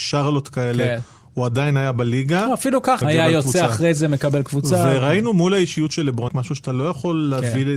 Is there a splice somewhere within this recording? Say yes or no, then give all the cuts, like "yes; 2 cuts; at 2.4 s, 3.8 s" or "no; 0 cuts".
yes; 2 cuts; at 3.0 s, 6.3 s